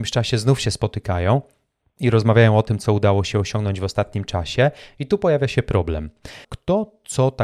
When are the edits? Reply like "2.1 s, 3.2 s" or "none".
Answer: 6.4 s